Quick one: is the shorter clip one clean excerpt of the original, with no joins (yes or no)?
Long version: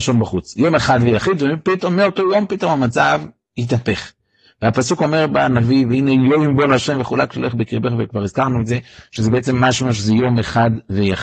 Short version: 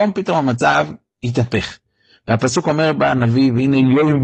yes